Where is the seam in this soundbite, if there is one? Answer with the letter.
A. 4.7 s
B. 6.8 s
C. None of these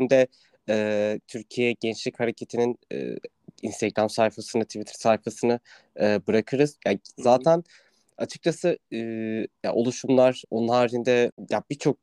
B